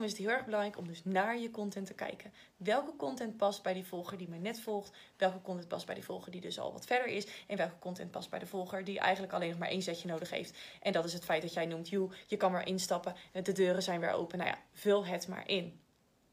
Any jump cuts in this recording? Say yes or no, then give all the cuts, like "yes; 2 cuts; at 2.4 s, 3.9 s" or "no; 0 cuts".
no; 0 cuts